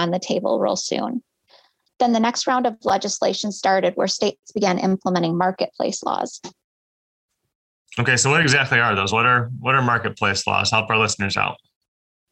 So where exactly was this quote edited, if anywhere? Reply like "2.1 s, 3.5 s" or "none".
1.9 s